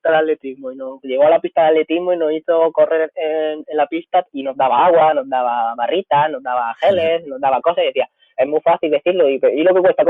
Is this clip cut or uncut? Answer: cut